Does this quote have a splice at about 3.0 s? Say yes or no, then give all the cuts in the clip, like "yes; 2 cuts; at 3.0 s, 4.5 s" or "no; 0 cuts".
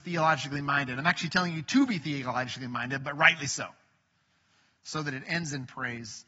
no; 0 cuts